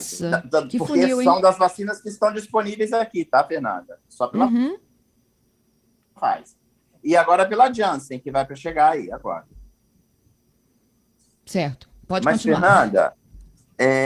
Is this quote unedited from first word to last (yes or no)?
yes